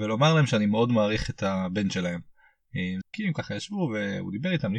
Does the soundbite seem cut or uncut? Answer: cut